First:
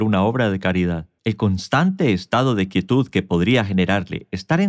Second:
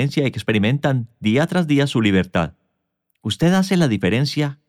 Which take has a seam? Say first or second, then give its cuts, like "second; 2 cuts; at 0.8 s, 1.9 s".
first; 1 cut; at 1.2 s